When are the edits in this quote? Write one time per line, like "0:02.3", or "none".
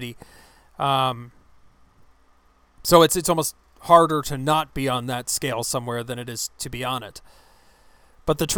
none